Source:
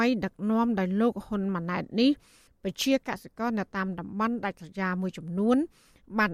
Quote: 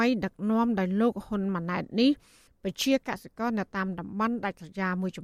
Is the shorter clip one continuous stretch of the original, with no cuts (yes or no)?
yes